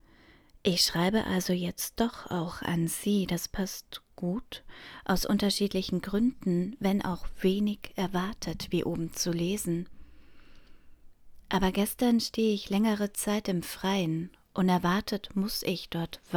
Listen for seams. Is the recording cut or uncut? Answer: uncut